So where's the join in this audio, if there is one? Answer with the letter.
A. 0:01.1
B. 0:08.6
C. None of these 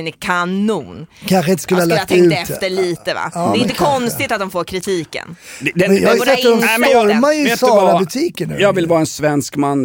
C